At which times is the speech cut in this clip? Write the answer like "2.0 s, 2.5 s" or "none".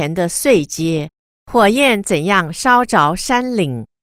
1.3 s